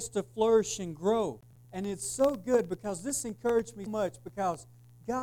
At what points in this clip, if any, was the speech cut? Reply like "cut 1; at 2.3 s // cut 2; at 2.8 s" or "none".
cut 1; at 1.6 s // cut 2; at 3.9 s